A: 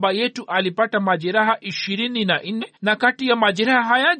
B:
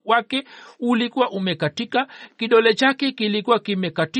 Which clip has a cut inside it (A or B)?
A